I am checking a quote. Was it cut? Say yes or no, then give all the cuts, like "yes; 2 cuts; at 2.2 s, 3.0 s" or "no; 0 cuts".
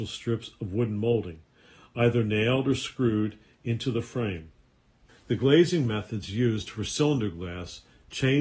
yes; 1 cut; at 5.1 s